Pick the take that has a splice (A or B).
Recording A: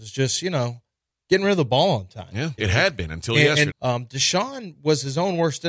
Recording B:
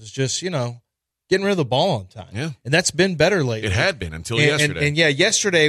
A